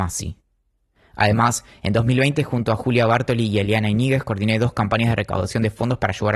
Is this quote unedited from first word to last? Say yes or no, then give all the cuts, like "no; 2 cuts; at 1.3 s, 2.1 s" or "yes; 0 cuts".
yes; 0 cuts